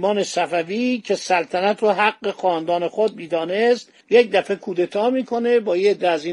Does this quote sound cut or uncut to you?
cut